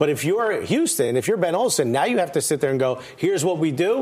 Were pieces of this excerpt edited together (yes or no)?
no